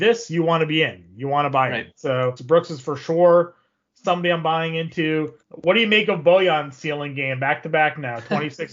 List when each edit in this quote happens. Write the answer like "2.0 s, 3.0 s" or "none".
2.4 s, 5.4 s